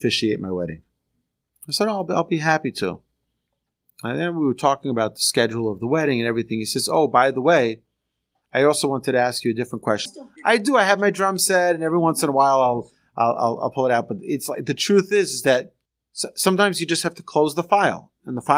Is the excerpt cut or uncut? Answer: cut